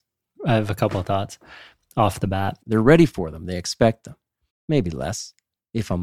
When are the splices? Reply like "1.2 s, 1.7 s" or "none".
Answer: 2.6 s, 4.5 s

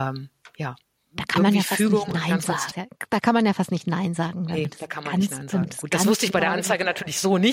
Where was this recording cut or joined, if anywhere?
2.7 s

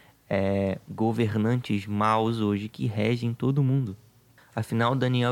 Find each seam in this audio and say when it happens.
4.4 s

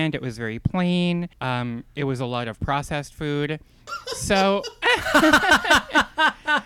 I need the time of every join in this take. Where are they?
1.3 s, 3.9 s

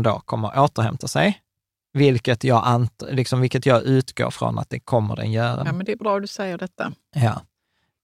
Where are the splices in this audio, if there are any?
5.6 s

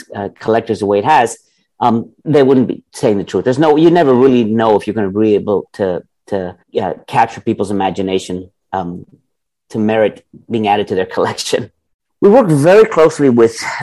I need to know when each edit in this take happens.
6.6 s, 12.1 s

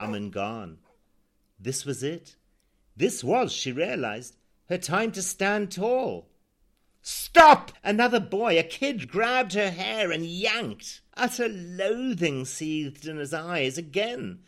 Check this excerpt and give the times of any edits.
7.7 s, 9.0 s, 11.1 s

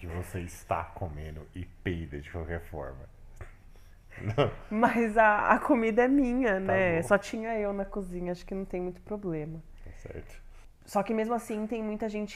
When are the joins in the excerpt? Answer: none

